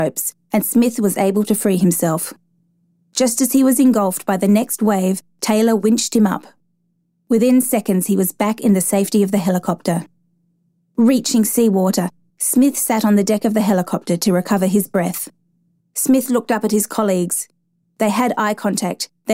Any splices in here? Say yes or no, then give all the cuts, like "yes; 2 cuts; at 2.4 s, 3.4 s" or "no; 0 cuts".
yes; 2 cuts; at 12.3 s, 15.8 s